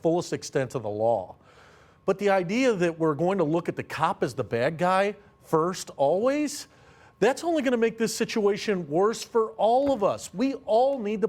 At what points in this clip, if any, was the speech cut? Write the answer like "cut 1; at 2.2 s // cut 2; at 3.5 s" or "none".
none